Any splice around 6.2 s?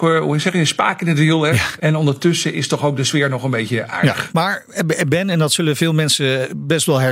no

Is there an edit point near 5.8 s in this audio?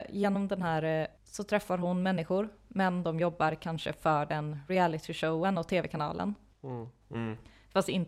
no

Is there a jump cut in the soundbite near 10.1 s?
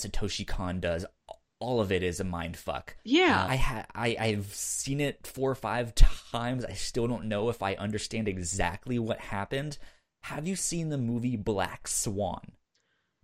no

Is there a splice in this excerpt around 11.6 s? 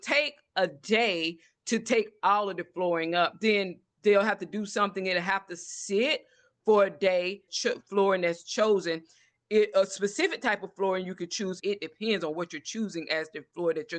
yes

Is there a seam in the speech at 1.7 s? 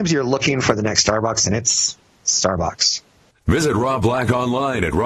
no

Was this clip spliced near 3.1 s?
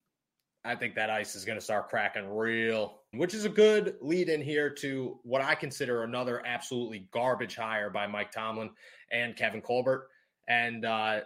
yes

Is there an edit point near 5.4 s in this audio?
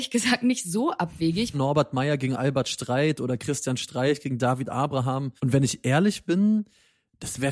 yes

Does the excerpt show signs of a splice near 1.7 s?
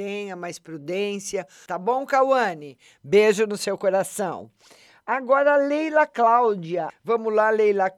yes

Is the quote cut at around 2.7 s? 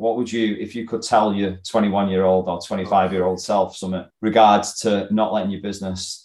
no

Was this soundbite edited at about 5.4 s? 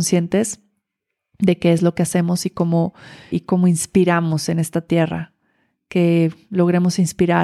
no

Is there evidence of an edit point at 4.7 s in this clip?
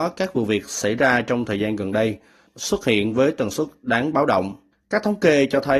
no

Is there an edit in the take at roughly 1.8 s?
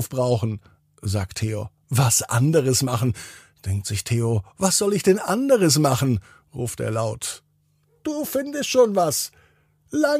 yes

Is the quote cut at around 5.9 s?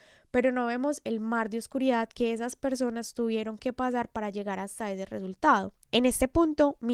yes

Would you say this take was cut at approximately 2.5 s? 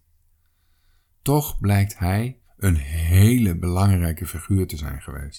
yes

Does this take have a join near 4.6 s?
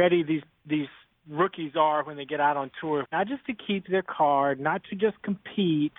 no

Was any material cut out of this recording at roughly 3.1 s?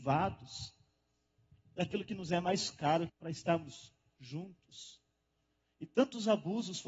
yes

